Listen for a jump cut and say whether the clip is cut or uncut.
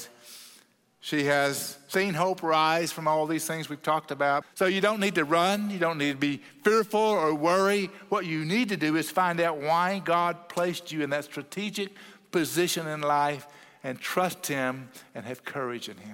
cut